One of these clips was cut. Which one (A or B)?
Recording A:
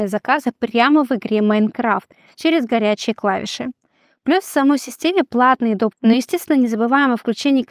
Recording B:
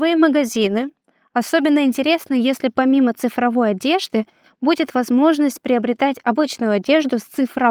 A